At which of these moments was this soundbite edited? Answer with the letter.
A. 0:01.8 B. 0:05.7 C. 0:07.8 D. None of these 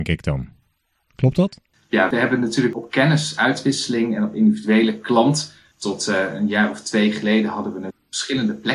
B